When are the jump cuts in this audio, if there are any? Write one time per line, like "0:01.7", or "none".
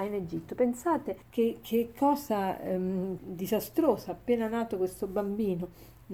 0:01.2
0:03.2